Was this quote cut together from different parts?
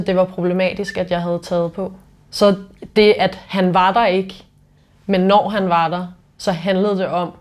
yes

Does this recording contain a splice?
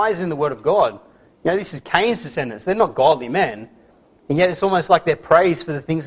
no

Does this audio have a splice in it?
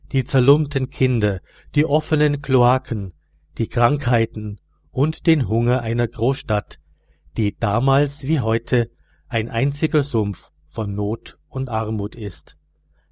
no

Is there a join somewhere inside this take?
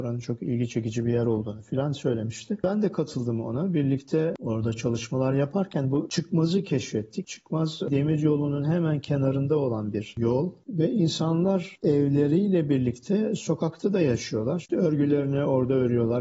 yes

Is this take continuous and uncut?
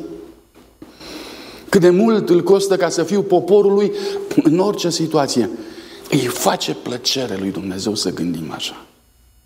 yes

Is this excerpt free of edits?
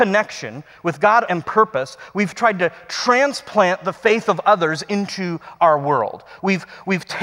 no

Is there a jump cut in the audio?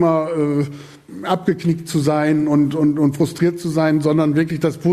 no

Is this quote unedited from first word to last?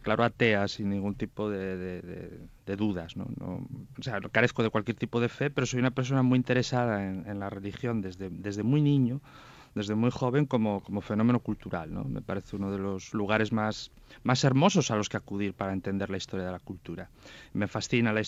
no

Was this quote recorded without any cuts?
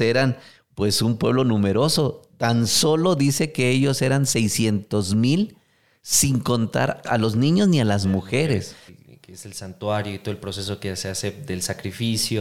no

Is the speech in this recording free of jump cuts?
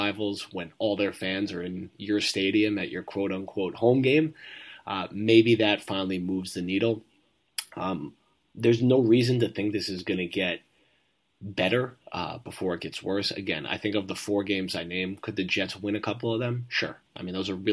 yes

